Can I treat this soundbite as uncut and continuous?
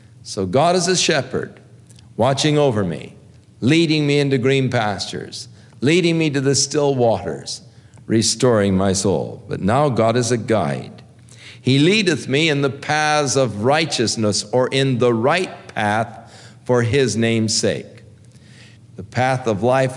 no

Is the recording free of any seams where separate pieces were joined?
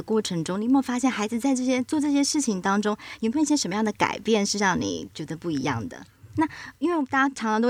no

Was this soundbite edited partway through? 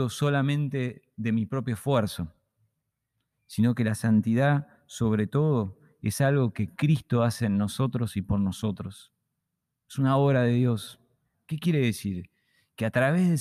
yes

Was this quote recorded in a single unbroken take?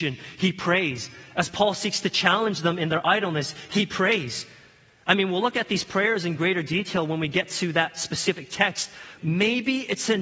no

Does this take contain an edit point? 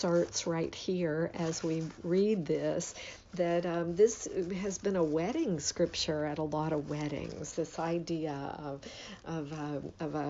no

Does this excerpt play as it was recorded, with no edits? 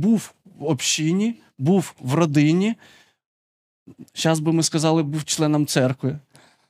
yes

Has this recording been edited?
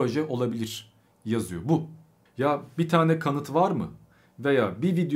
yes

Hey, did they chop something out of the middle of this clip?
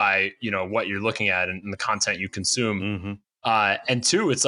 no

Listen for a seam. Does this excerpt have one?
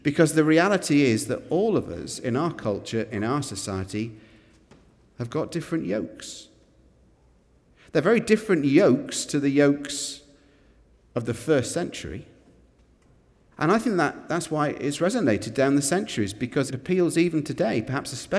yes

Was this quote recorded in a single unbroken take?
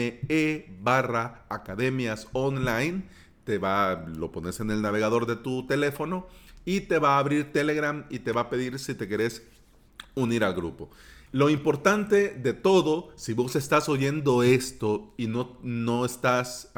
no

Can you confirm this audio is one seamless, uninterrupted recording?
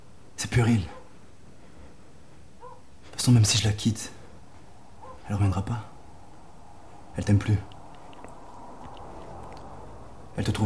yes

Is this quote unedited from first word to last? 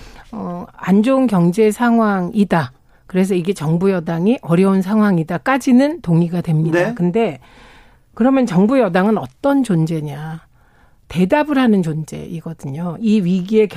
yes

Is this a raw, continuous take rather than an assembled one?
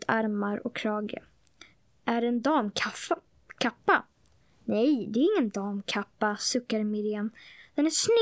yes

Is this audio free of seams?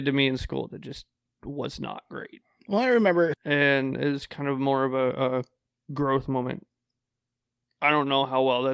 no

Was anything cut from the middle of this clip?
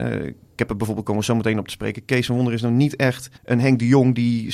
yes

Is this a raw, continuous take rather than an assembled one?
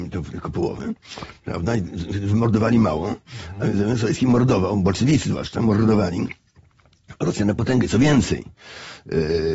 yes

